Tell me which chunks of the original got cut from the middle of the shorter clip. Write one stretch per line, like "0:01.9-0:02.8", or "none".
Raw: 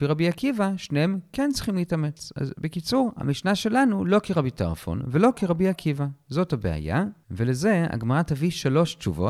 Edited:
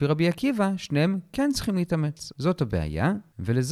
0:02.3-0:06.2